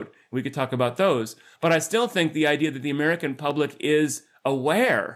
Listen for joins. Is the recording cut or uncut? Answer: uncut